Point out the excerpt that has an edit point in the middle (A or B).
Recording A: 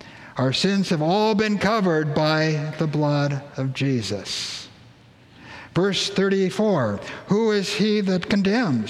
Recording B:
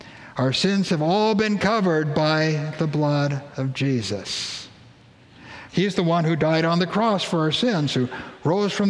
B